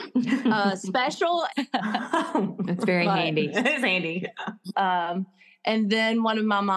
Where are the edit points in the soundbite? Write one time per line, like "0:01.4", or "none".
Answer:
0:01.5
0:04.7